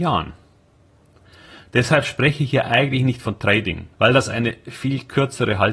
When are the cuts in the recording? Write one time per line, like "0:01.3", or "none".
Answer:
0:03.9